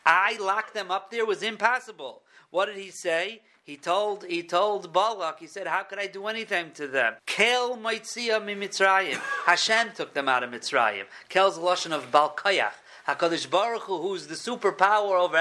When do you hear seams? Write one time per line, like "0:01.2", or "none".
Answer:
0:07.2